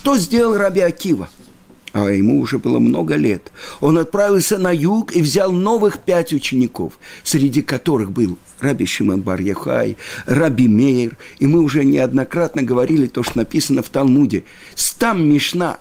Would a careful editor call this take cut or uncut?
uncut